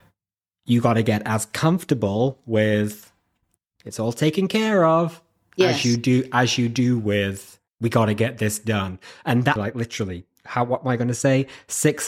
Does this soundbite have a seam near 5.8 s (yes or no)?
no